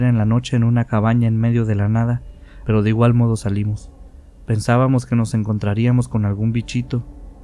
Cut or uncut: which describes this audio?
cut